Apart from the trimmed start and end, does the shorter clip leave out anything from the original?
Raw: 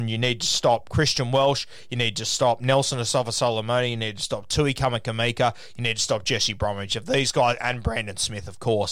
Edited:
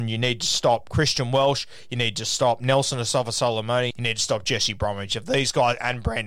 yes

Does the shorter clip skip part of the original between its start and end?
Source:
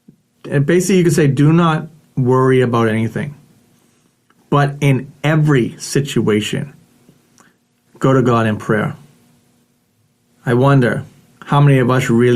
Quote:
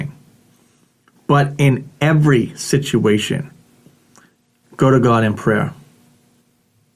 no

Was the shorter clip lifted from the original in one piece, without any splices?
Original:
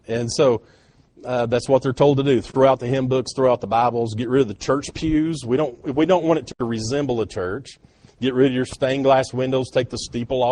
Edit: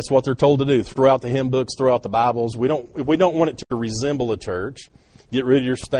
no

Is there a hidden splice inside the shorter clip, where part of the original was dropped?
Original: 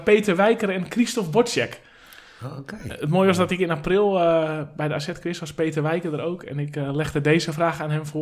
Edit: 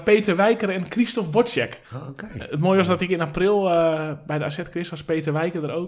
yes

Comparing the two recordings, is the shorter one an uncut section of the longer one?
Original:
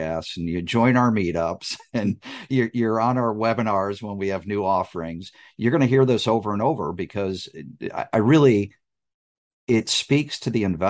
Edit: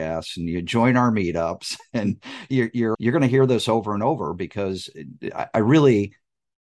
no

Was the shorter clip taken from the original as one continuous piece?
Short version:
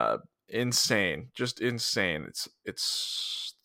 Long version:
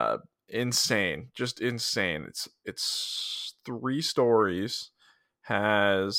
yes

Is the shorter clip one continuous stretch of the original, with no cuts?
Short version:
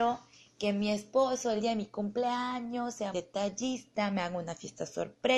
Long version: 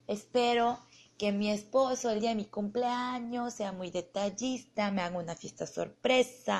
no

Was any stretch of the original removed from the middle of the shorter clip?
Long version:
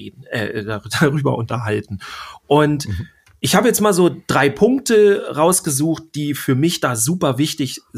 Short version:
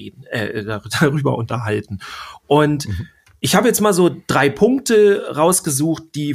no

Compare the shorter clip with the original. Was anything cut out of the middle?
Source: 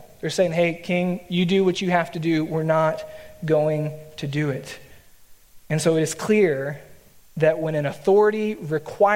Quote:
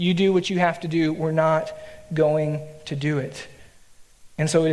no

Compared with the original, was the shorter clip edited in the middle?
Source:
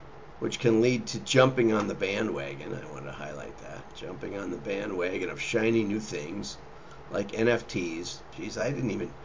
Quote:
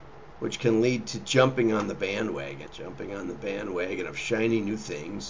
yes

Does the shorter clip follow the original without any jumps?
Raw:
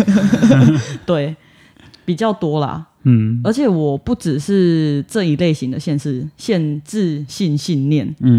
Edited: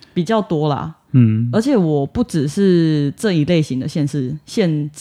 yes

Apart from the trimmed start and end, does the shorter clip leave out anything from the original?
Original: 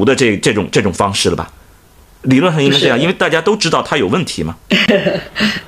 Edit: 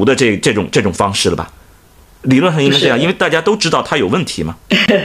no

